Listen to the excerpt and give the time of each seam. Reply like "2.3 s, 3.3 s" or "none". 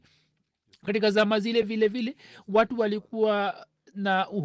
none